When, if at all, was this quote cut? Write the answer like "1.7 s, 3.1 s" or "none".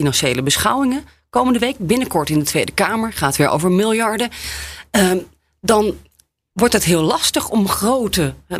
1.8 s